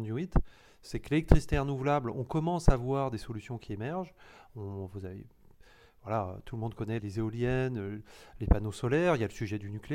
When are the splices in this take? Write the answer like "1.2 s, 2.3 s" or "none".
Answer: 7.0 s